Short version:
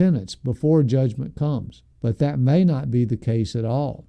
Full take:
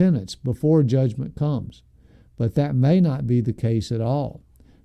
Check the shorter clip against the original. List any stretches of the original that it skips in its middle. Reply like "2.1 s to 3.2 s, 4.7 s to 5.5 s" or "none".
1.9 s to 2.3 s